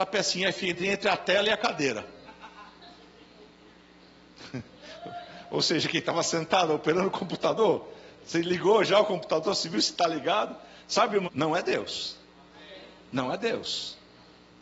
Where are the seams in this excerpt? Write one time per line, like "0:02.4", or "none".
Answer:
0:11.2